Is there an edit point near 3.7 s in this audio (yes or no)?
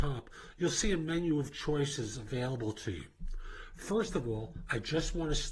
yes